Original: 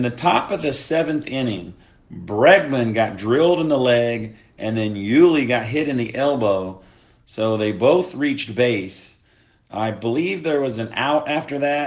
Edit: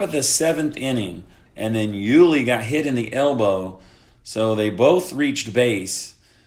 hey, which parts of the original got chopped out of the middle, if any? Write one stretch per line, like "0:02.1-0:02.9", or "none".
0:02.0-0:04.5